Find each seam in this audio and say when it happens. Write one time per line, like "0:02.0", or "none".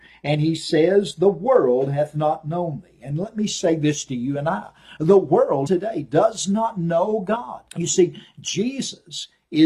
0:05.7
0:07.7